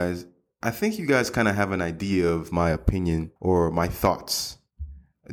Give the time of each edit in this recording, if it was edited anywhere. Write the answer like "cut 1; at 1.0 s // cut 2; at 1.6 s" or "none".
cut 1; at 3.4 s